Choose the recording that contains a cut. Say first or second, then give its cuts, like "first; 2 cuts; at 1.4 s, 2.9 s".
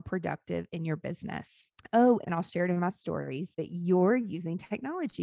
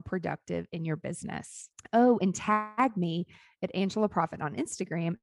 first; 1 cut; at 2.2 s